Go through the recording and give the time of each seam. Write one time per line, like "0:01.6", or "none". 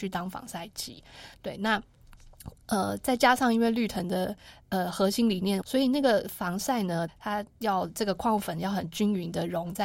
0:05.6
0:07.1